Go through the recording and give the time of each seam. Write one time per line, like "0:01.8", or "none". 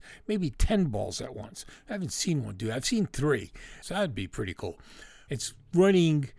0:03.8
0:05.3